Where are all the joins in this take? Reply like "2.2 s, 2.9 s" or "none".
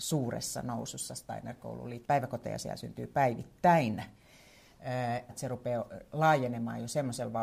2.0 s, 5.3 s